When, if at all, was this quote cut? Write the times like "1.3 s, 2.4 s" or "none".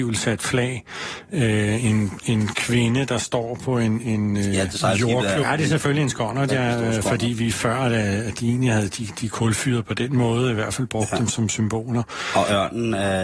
5.4 s